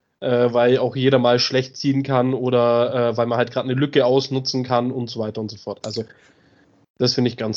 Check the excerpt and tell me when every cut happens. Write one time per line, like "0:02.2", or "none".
none

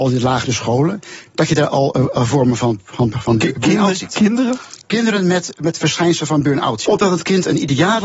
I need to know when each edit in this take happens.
0:06.9

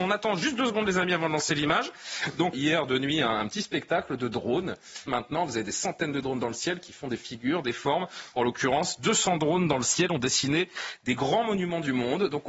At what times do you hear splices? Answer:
0:02.5
0:05.1

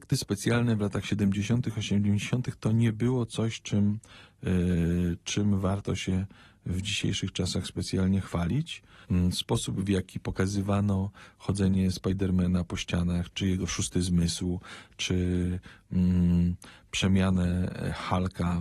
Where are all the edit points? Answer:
0:09.0
0:13.3

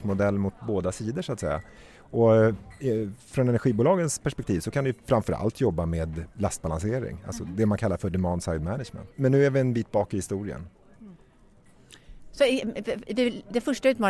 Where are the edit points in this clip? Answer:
0:09.1

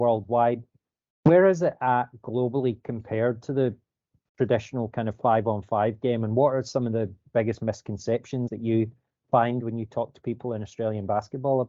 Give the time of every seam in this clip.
0:08.5

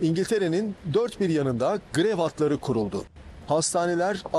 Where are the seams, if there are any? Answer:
0:03.4

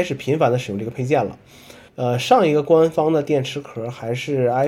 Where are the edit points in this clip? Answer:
0:01.9

